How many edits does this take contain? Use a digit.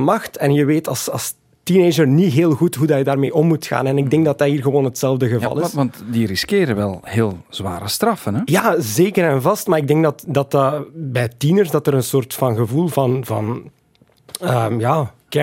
0